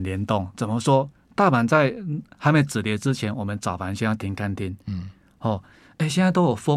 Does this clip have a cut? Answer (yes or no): no